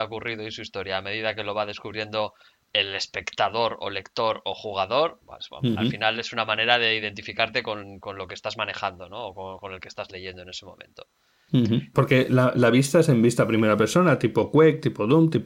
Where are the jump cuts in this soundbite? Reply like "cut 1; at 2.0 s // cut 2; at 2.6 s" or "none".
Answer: cut 1; at 11.9 s